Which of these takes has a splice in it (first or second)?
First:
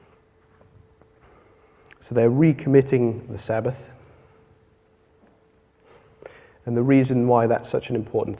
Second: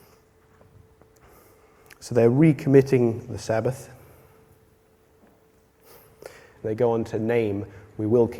second